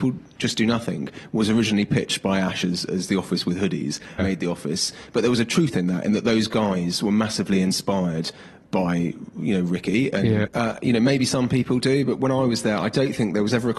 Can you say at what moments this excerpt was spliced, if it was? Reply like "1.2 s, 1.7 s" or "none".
4.2 s, 10.5 s